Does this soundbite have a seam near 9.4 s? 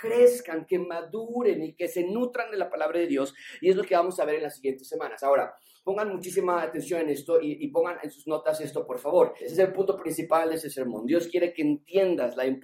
yes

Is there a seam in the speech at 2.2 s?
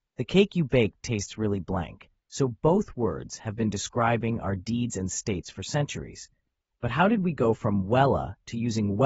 yes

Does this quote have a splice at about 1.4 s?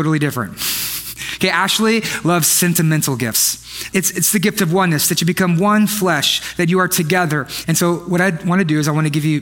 no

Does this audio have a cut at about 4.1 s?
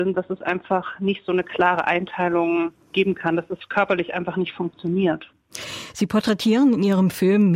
no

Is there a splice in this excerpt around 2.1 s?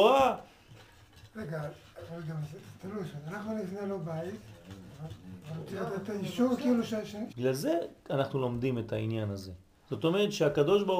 no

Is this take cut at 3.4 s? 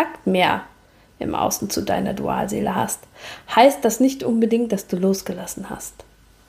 no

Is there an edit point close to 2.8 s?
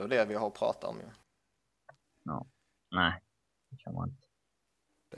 yes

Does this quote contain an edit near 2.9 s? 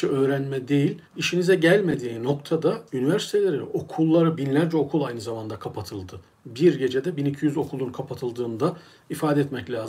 yes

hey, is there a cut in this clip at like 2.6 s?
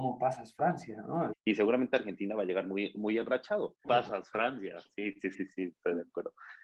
no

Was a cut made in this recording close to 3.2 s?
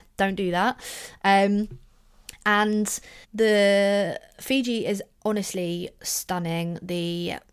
yes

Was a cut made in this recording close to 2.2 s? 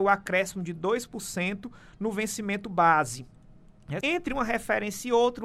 no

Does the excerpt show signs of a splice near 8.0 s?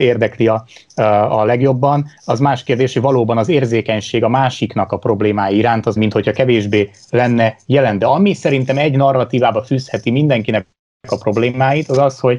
no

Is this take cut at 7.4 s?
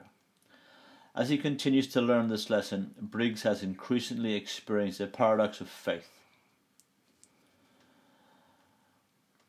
no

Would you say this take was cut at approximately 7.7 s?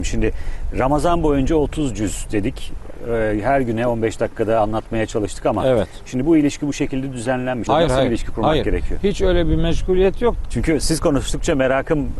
yes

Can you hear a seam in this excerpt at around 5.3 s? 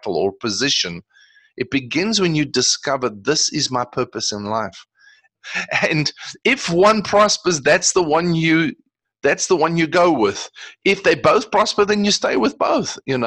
yes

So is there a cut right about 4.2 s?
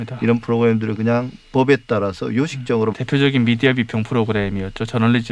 no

